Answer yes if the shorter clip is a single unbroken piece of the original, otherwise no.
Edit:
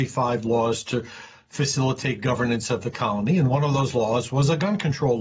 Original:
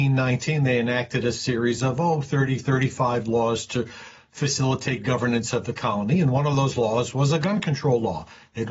yes